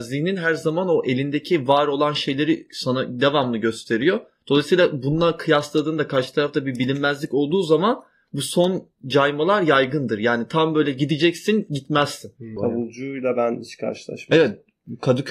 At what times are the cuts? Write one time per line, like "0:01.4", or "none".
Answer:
0:12.6